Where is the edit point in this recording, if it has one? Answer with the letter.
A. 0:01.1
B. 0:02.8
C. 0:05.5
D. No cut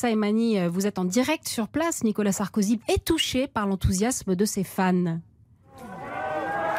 B